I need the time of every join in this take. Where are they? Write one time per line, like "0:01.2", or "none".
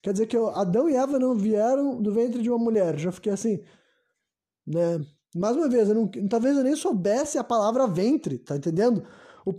none